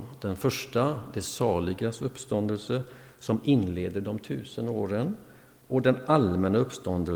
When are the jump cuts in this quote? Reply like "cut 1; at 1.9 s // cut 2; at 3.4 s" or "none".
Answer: none

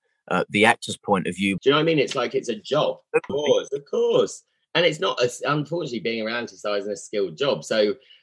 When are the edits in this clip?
cut 1; at 1.6 s // cut 2; at 3.3 s

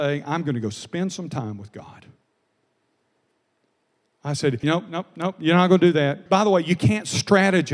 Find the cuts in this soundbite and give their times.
cut 1; at 4.6 s // cut 2; at 6.3 s

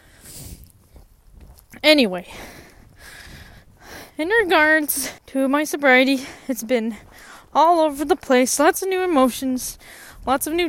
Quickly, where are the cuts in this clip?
cut 1; at 5.2 s

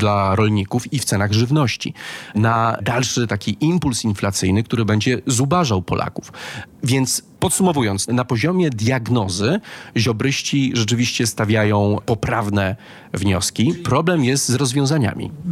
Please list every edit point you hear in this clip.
none

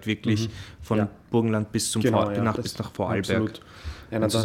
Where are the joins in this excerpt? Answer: none

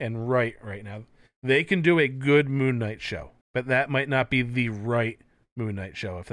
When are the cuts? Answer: cut 1; at 3.4 s

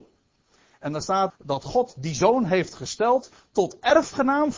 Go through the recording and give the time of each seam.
cut 1; at 1.3 s

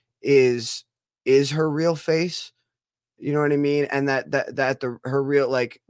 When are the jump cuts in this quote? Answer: none

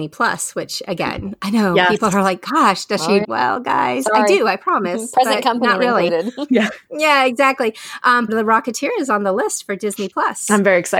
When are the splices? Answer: cut 1; at 3.2 s // cut 2; at 8.3 s

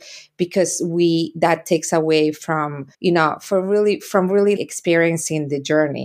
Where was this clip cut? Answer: cut 1; at 2.9 s // cut 2; at 4.6 s

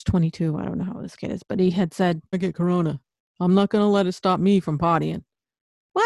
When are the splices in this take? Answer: cut 1; at 2.3 s

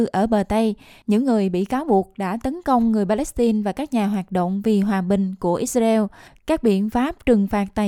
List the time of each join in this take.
none

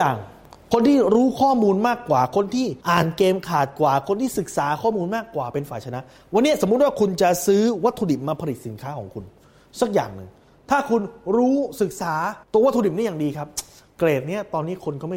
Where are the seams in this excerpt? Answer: cut 1; at 2.8 s // cut 2; at 12.4 s

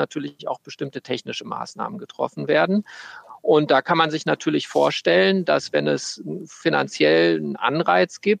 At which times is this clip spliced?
none

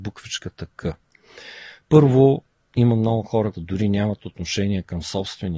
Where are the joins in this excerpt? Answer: cut 1; at 3.5 s

